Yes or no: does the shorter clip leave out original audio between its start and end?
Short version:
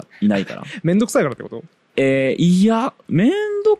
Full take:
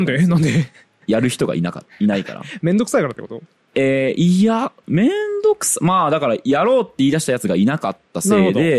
no